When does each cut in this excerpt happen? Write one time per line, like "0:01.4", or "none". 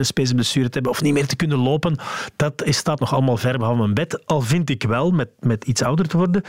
none